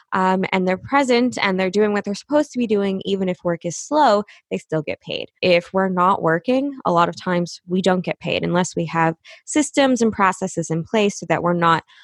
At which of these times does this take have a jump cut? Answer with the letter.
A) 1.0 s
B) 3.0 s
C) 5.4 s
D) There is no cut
C